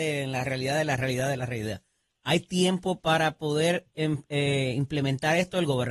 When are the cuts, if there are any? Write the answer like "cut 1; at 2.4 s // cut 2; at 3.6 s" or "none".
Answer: none